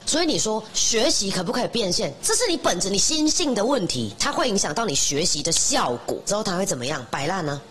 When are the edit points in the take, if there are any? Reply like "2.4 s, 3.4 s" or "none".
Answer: 2.2 s, 4.2 s, 6.3 s